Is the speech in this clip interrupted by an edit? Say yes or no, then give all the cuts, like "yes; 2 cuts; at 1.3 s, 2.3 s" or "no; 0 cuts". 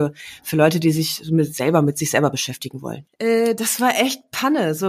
yes; 1 cut; at 3.1 s